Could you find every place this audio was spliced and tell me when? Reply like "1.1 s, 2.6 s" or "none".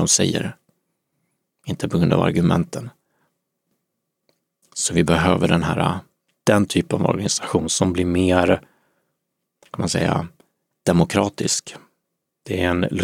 none